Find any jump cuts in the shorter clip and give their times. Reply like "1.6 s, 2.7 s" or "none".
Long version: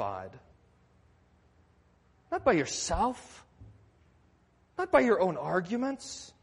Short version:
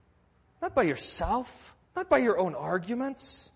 1.8 s